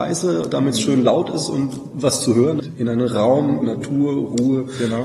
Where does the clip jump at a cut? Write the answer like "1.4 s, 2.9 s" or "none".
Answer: 2.6 s, 3.6 s